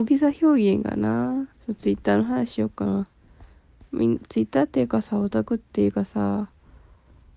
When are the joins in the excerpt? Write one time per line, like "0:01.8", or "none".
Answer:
0:01.5